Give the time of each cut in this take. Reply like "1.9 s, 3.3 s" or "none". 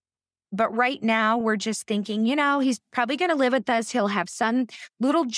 none

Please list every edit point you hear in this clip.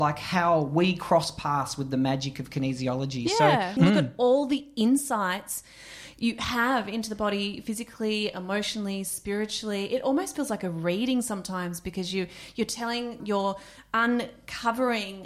3.8 s, 13.2 s

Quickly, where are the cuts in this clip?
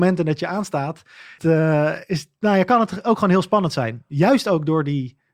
1.4 s

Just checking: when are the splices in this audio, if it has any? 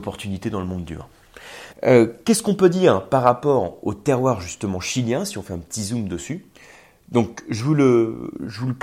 1.7 s

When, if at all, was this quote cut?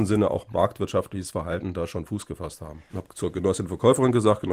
2.9 s

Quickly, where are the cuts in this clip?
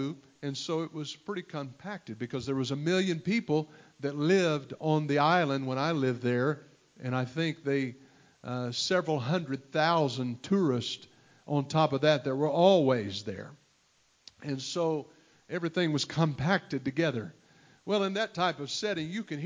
none

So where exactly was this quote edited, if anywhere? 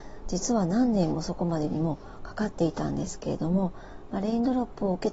none

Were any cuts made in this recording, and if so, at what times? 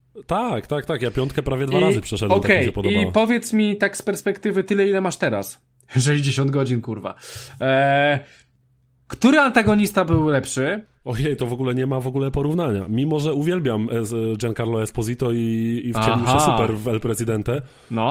none

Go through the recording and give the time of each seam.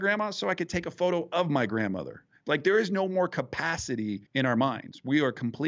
4.3 s

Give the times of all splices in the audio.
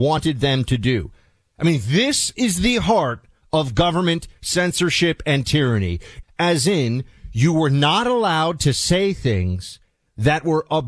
6.2 s

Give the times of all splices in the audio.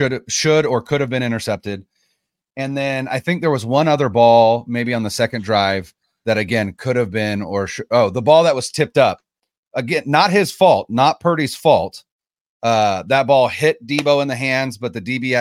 none

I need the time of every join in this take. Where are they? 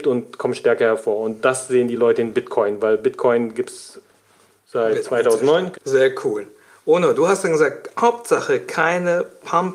5.7 s

